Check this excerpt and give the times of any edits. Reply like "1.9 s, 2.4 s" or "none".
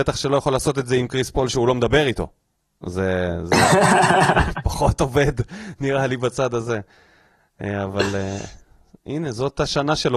none